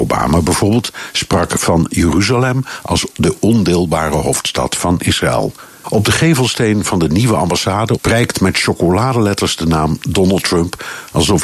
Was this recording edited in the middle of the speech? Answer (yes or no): yes